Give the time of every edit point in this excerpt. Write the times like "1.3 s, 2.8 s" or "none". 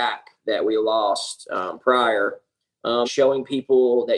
3.0 s